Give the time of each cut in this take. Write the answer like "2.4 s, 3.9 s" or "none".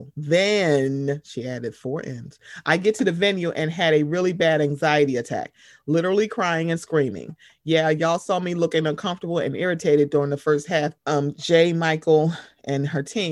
11.0 s